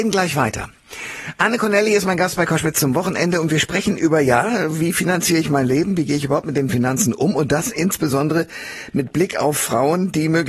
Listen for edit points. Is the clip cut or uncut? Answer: uncut